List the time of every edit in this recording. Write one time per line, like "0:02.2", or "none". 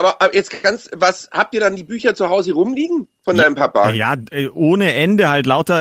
none